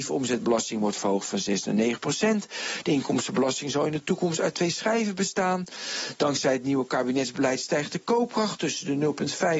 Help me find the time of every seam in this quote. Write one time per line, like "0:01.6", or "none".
none